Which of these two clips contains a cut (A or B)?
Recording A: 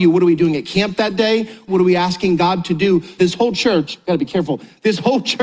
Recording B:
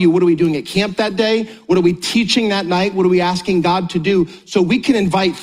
A